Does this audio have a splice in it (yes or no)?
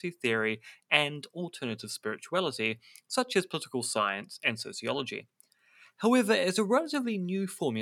no